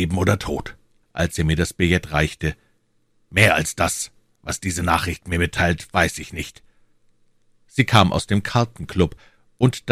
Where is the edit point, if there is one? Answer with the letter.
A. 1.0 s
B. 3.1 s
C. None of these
A